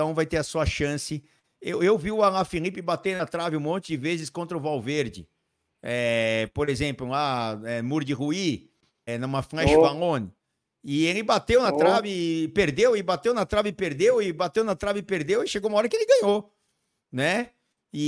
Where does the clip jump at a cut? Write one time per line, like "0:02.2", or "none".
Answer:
0:09.1